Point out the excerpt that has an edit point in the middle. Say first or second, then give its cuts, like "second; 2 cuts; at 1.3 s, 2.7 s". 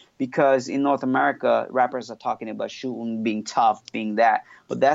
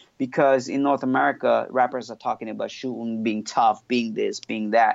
first; 1 cut; at 3.9 s